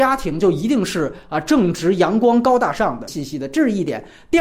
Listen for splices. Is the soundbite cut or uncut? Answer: cut